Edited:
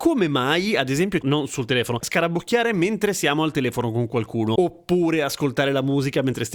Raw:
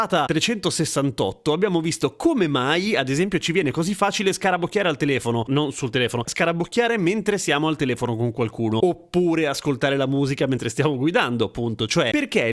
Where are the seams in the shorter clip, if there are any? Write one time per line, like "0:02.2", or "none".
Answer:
0:01.2